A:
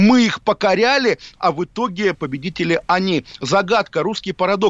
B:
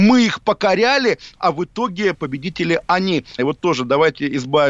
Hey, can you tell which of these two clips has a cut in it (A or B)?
B